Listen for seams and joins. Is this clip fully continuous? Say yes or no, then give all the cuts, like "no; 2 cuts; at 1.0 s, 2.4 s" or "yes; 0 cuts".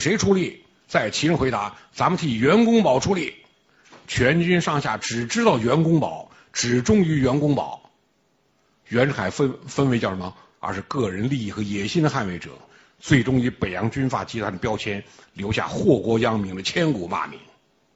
no; 1 cut; at 10.5 s